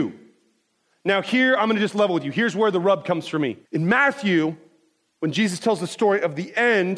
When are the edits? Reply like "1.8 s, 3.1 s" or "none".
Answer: 3.7 s